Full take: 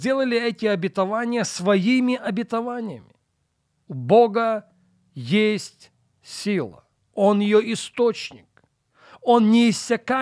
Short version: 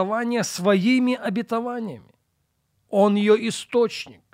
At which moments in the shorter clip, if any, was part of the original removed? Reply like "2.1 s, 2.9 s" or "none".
2.7 s